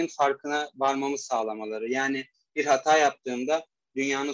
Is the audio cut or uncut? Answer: uncut